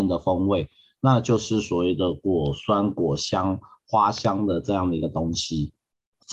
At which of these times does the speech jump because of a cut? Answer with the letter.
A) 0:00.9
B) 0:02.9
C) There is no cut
C